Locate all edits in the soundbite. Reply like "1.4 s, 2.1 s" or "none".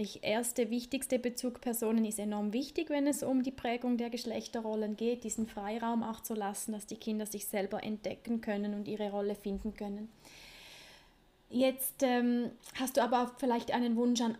none